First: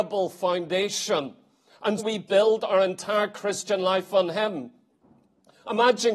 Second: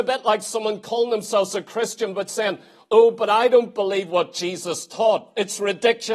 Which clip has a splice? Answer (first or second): first